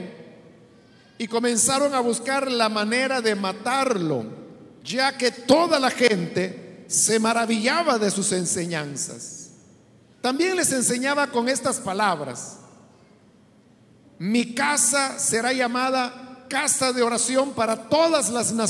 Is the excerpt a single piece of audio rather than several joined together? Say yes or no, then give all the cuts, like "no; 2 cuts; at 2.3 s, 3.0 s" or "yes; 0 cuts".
no; 3 cuts; at 4.8 s, 10.1 s, 14.1 s